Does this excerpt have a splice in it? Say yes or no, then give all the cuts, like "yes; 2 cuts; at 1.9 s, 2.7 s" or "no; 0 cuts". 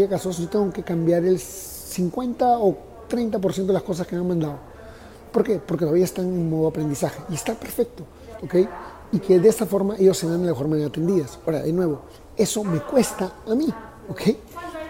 yes; 1 cut; at 8.4 s